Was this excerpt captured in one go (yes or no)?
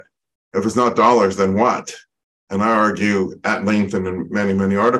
yes